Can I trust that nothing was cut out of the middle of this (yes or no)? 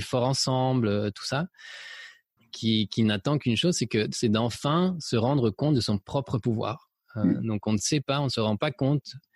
no